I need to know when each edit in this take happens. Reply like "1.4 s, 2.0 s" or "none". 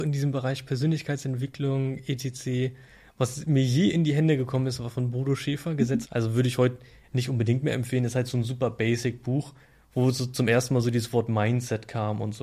6.0 s